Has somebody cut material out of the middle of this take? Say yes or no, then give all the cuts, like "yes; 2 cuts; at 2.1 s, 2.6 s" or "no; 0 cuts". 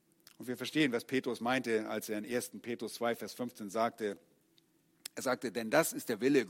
no; 0 cuts